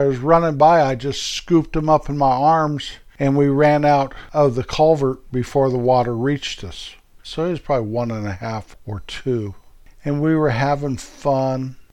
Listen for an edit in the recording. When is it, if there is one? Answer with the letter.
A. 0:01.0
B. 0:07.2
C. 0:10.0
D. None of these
B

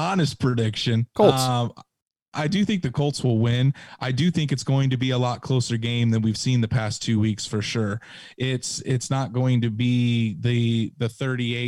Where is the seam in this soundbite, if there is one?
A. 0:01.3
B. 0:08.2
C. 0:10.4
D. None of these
D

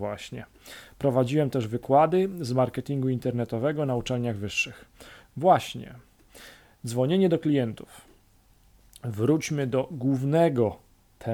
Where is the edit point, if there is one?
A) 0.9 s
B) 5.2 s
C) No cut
B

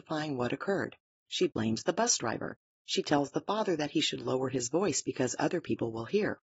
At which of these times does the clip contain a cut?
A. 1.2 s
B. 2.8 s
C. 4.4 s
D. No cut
A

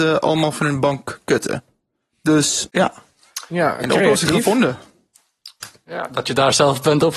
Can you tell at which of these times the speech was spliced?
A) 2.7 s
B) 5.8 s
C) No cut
A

